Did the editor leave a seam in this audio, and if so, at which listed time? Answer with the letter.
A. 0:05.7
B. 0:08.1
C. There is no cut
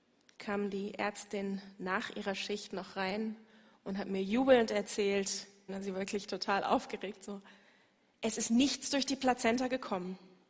A